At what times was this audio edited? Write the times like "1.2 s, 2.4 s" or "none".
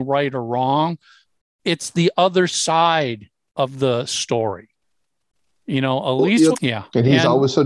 6.5 s